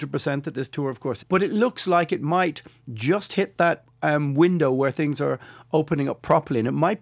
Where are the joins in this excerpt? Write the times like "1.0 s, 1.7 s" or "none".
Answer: 1.2 s